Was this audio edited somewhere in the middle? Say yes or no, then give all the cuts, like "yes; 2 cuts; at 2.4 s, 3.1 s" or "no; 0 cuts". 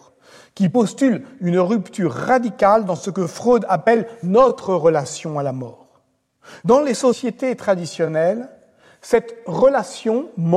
no; 0 cuts